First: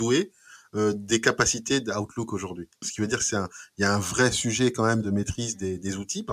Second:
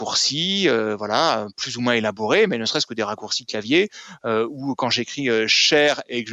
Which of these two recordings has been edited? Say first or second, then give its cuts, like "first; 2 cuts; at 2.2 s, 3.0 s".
first; 2 cuts; at 2.8 s, 5.0 s